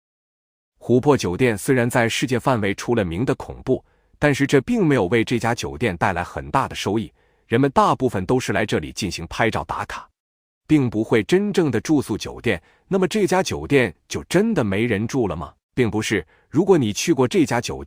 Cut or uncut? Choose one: cut